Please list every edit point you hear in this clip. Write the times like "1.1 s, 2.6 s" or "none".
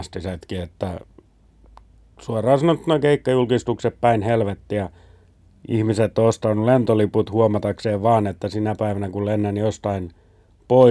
none